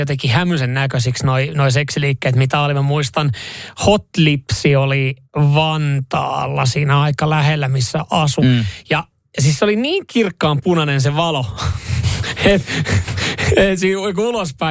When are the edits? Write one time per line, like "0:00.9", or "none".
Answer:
0:05.2